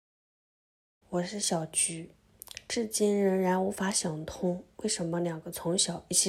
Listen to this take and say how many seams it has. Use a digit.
1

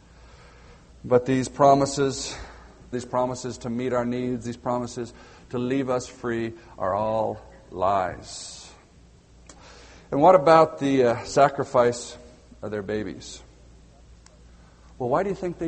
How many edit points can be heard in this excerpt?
1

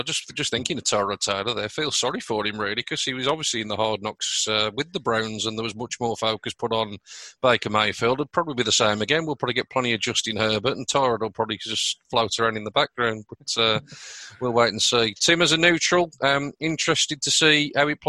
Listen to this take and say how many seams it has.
0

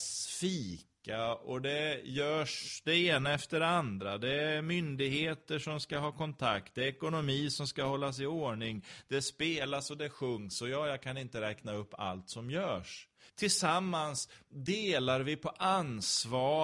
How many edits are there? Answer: 1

